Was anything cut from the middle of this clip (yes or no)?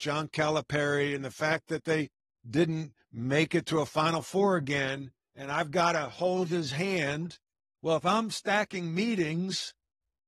no